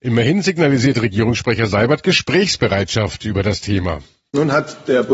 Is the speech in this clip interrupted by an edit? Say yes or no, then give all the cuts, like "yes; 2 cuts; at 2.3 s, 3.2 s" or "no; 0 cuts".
no; 0 cuts